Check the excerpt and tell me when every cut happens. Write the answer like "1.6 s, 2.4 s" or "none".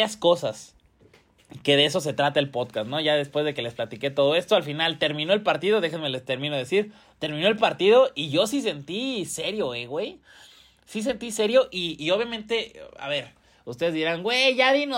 none